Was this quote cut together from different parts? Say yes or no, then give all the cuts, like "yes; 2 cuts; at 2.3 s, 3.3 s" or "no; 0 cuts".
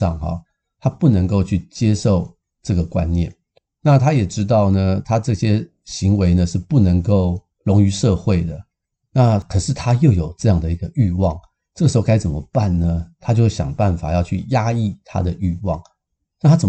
no; 0 cuts